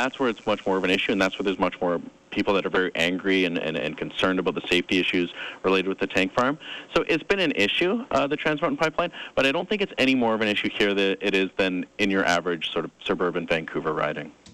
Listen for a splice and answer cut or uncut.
uncut